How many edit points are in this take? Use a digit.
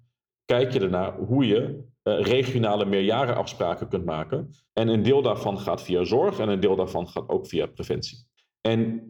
1